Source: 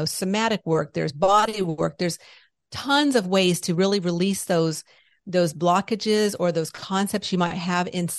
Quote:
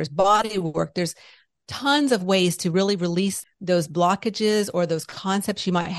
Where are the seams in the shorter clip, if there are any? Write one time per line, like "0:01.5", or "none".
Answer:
0:03.4